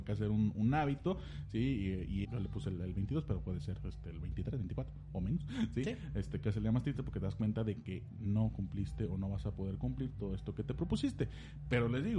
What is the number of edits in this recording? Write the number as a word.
one